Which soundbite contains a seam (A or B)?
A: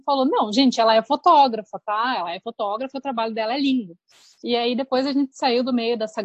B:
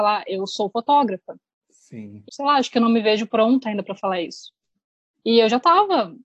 B